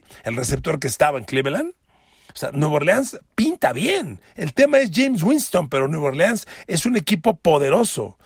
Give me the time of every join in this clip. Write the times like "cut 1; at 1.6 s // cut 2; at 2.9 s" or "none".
none